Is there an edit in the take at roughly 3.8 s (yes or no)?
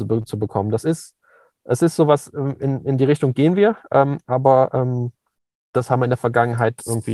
no